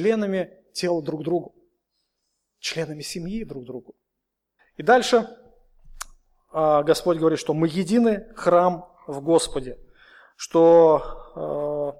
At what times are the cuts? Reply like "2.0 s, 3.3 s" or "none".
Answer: 4.6 s

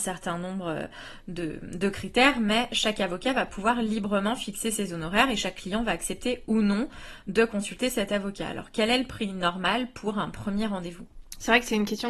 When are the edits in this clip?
none

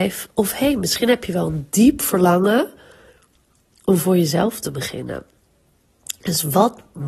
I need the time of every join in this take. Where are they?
none

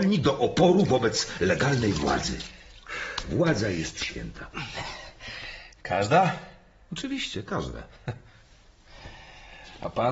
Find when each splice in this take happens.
none

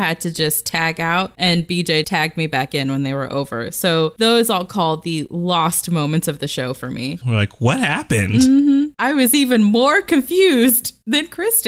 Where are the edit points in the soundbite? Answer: 2.0 s, 7.2 s

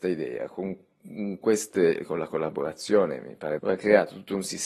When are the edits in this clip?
3.6 s

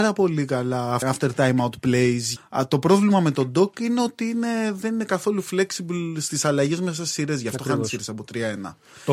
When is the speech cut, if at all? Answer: 1.0 s, 2.4 s

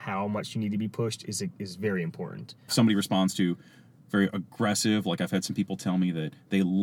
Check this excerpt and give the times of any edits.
2.7 s

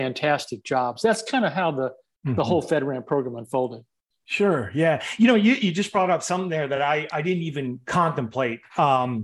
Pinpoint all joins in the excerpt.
none

